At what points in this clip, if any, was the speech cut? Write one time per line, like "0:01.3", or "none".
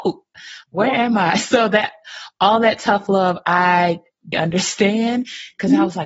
0:04.3

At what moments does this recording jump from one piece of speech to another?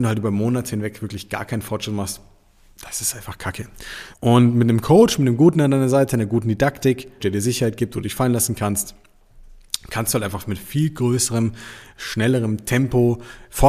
0:04.1
0:07.2

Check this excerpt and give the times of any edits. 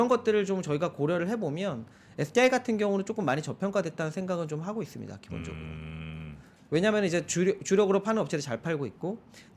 none

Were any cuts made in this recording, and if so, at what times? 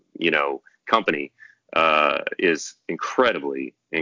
none

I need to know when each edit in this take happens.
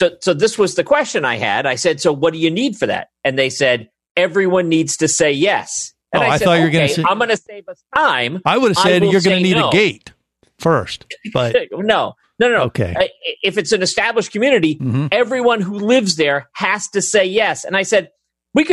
none

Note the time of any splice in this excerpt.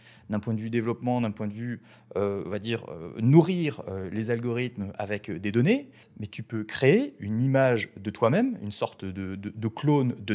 none

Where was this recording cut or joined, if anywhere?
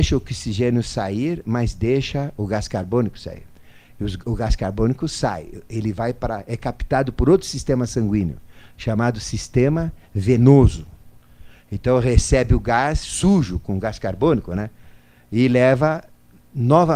none

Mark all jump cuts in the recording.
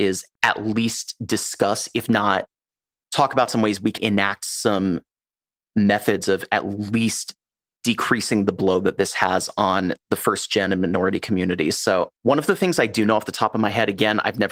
0:04.0
0:12.1

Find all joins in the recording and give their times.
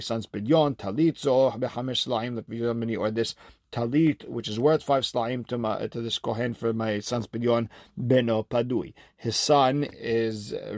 none

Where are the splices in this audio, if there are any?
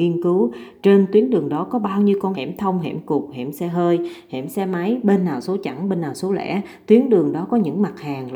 0:02.3

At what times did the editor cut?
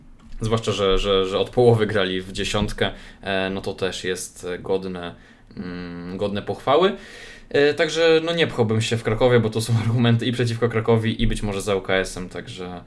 none

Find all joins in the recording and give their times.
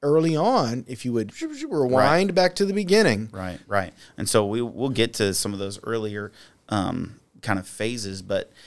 0:01.3
0:03.6

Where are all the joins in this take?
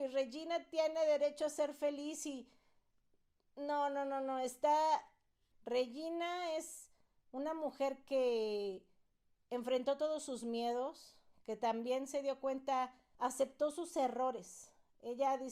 0:05.5

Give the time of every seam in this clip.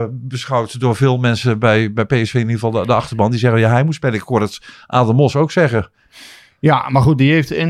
none

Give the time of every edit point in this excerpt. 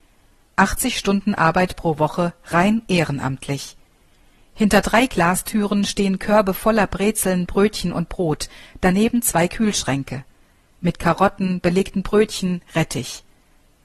none

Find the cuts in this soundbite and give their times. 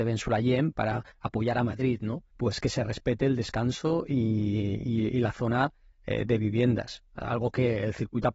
0:02.3

